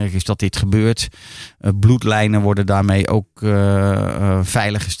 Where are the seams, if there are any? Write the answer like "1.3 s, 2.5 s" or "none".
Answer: none